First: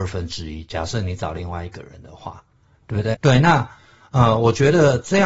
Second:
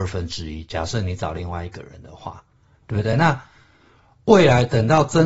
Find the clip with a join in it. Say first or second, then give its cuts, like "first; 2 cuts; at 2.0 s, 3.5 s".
first; 1 cut; at 3.1 s